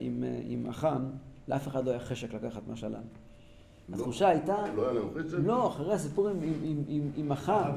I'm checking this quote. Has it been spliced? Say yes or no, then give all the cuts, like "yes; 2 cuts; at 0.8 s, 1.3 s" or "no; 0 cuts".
no; 0 cuts